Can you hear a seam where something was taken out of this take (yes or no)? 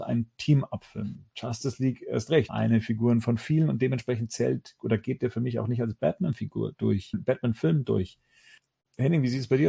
yes